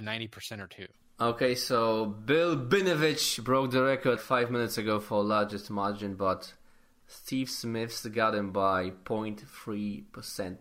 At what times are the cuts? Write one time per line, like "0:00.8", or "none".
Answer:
0:04.2